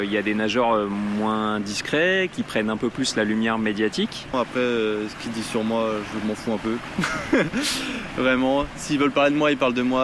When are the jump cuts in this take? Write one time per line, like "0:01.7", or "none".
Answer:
0:04.3

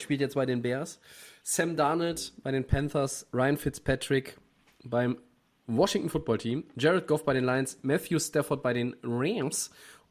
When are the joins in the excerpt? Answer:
none

